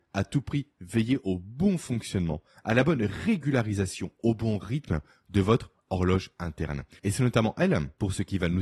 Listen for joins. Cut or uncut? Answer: cut